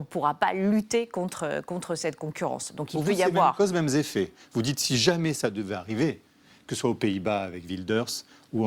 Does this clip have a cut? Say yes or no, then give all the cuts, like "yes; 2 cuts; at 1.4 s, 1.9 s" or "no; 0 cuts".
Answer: no; 0 cuts